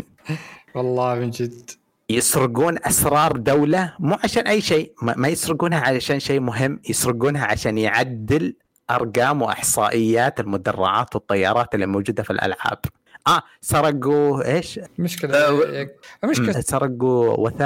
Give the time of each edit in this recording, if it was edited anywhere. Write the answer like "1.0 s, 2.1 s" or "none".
14.8 s, 16.5 s